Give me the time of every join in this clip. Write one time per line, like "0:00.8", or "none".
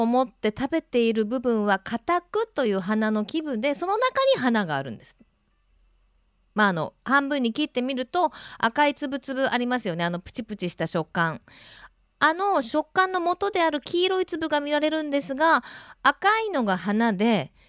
none